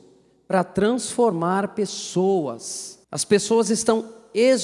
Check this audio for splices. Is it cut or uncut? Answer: cut